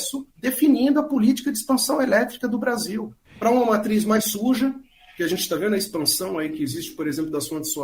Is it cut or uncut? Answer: uncut